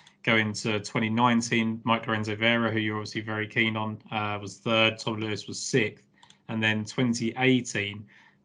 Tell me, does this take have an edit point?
no; 0 cuts

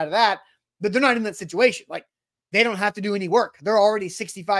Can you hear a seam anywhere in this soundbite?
no; 0 cuts

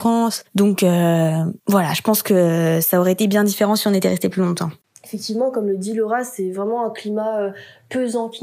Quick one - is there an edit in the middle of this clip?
yes; 1 cut; at 1.6 s

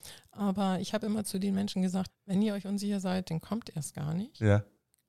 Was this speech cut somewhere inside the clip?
yes; 1 cut; at 2.1 s

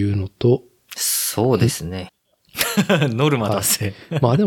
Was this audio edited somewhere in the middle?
yes; 1 cut; at 2.1 s

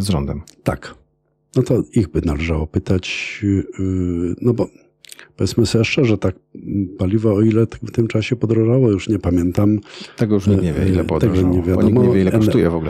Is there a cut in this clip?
no; 0 cuts

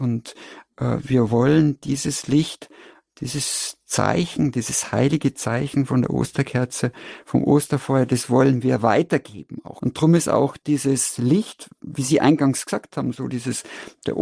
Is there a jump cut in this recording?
yes; 1 cut; at 9.8 s

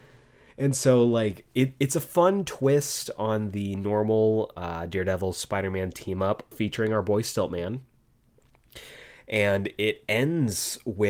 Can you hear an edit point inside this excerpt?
yes; 1 cut; at 6.5 s

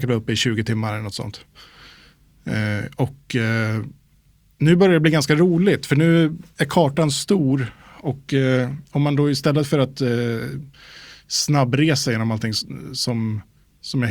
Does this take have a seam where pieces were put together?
no; 0 cuts

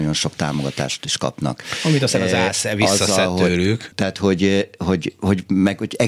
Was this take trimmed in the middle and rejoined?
yes; 1 cut; at 3.9 s

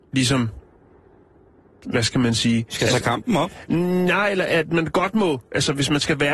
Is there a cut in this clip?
no; 0 cuts

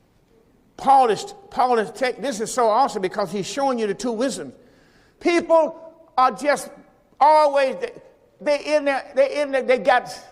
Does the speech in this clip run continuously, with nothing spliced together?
no; 2 cuts; at 5.1 s, 8.4 s

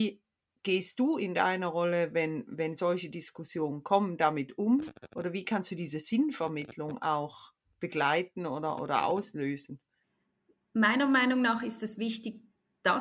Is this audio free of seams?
yes; 0 cuts

